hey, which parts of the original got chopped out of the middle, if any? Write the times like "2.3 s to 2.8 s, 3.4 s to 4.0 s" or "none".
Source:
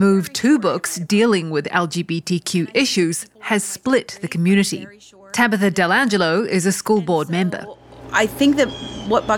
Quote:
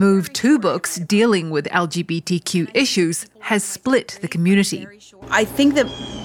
5.2 s to 8.0 s